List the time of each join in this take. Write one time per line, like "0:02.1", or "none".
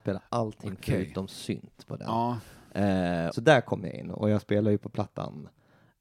0:03.3